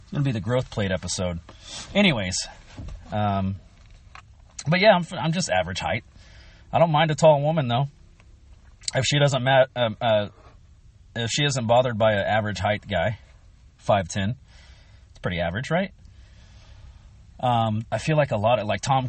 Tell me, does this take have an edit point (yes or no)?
yes